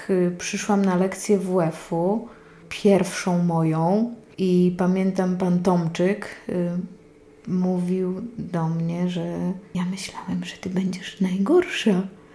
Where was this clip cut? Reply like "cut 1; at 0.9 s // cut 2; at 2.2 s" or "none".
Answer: none